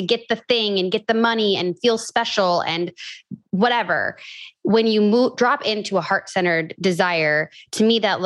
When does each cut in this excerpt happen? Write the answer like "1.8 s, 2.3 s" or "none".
3.4 s

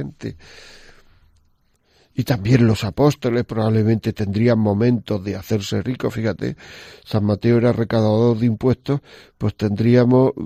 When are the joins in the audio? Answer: none

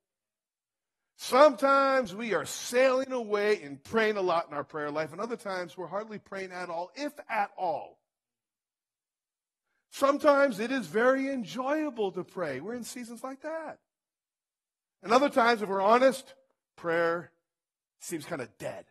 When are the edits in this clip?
none

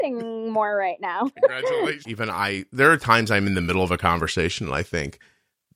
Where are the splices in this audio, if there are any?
2.0 s

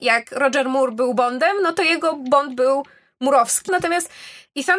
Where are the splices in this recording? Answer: 3.7 s

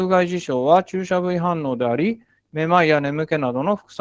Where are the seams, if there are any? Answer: 2.4 s

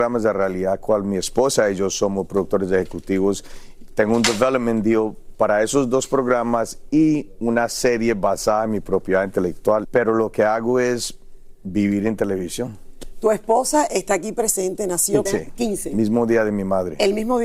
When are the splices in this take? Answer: 9.8 s, 15.3 s

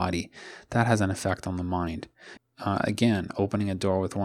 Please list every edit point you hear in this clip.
2.4 s

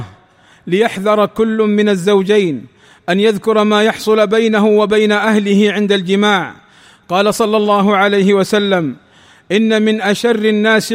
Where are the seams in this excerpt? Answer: none

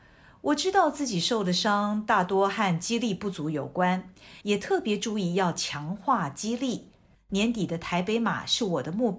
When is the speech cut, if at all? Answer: 4.4 s, 7.1 s

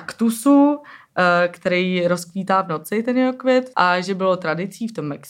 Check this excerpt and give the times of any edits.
none

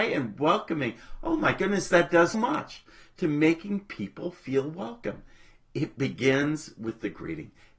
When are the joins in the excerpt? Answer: 2.3 s

